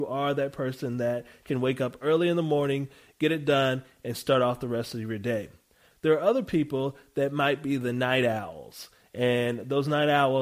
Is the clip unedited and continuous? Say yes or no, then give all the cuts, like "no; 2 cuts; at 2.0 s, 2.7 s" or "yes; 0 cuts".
no; 1 cut; at 5.9 s